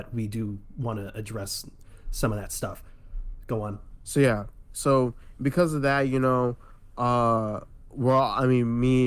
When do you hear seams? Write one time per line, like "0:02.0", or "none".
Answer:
0:04.0

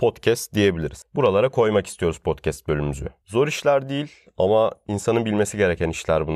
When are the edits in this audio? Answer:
none

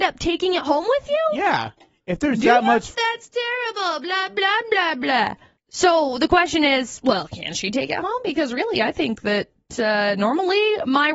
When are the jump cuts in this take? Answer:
0:02.9

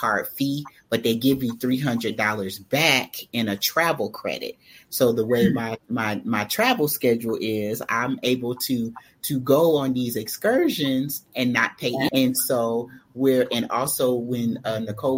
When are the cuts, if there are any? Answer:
0:12.1

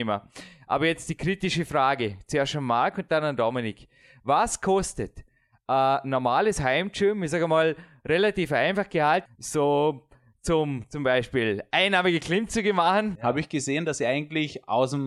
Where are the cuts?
0:09.3
0:13.2

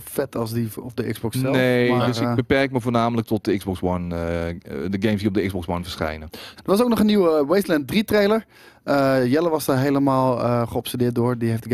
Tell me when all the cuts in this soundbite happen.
0:06.6

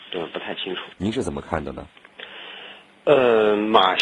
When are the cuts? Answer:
0:00.9

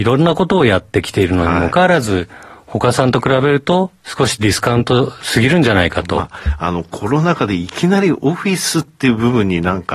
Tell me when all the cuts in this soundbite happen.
0:01.7

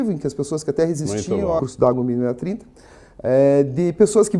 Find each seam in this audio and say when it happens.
0:01.6

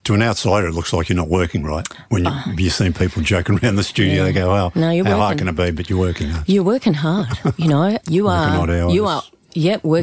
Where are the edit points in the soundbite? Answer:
0:08.0

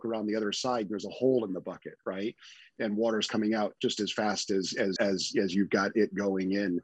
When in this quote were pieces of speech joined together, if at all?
0:05.0

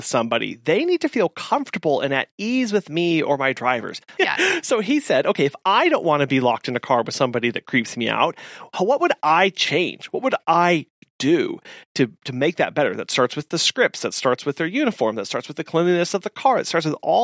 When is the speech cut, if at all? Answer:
0:04.2

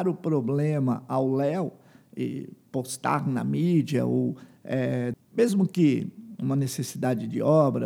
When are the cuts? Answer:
0:05.1

